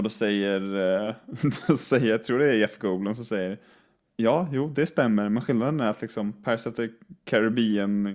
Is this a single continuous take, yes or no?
yes